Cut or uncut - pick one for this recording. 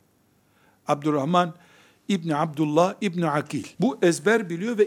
cut